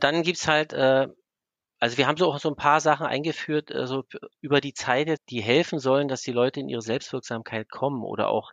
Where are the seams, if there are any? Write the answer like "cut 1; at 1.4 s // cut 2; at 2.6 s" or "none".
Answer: cut 1; at 5.2 s